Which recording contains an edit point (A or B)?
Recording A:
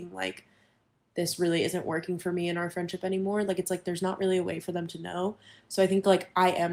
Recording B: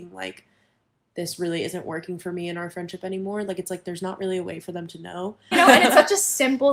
B